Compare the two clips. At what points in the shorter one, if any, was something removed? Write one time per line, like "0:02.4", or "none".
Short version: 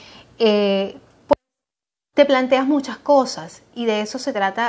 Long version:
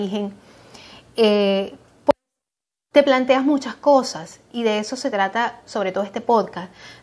none